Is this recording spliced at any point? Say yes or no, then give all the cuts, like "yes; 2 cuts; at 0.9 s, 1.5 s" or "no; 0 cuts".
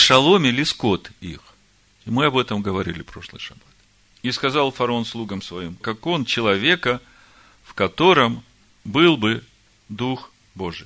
yes; 2 cuts; at 4.1 s, 5.8 s